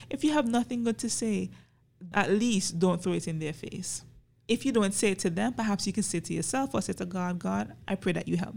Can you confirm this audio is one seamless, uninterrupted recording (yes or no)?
no